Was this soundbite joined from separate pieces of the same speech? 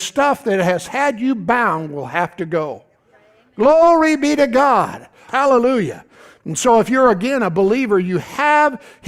yes; 1 cut; at 5.3 s

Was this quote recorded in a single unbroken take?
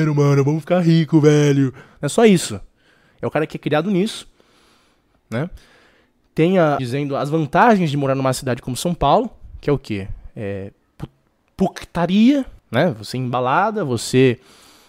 no; 2 cuts; at 6.8 s, 12.6 s

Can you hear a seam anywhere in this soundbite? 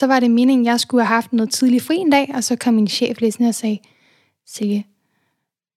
no; 0 cuts

